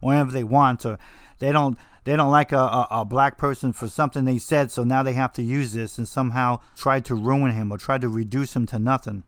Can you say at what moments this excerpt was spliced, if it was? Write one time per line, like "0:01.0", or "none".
0:06.7

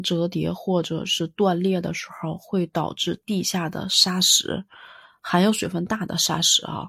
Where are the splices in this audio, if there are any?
none

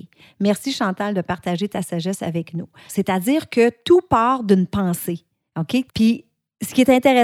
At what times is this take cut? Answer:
0:02.9
0:05.9

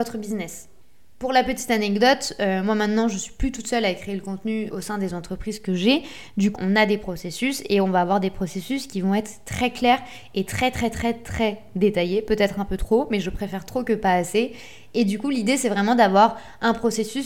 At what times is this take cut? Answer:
0:04.7
0:06.6

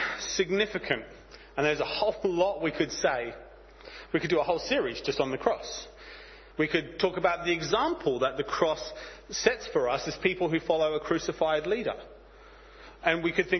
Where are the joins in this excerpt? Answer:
0:06.5

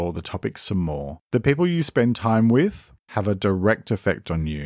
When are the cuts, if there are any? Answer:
0:01.2
0:03.0

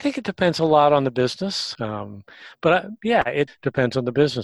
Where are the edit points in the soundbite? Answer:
0:01.7
0:03.5

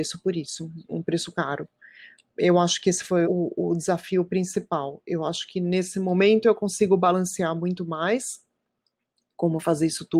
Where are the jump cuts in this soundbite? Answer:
0:03.2

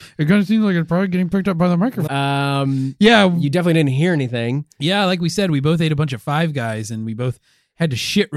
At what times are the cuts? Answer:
0:02.1

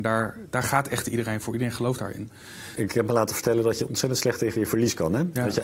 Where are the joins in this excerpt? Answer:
0:02.8

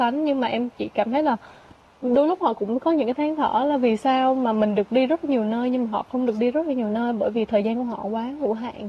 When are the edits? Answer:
none

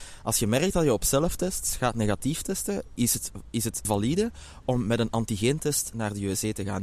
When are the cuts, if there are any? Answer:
0:03.8

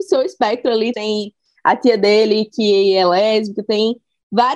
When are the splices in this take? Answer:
0:00.9

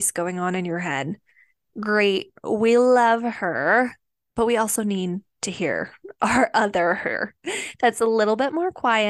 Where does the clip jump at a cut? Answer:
none

